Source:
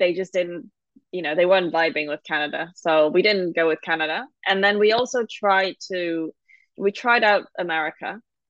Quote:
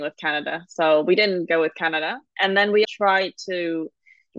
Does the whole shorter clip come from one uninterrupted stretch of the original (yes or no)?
no